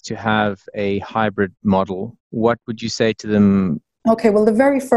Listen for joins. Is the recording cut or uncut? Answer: cut